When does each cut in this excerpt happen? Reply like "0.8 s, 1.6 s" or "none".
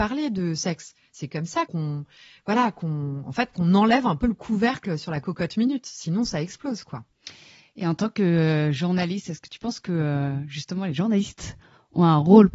1.7 s